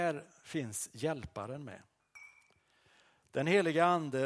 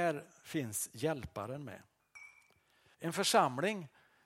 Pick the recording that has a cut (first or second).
second